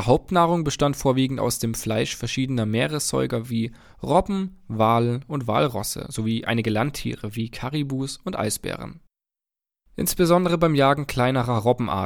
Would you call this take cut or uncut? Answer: uncut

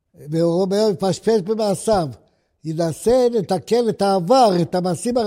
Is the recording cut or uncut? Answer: uncut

